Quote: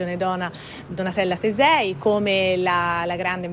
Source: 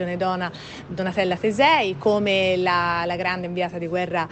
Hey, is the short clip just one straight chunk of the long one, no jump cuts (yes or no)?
yes